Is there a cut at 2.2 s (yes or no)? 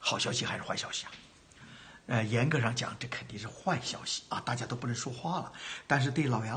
no